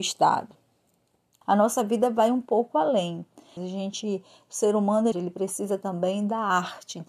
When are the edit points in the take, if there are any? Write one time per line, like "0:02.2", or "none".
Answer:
0:01.4
0:03.6
0:05.1